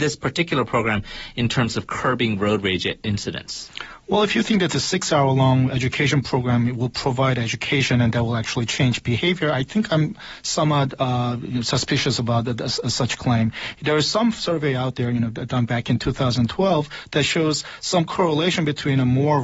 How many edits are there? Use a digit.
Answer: 0